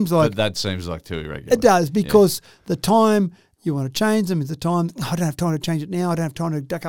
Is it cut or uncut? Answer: uncut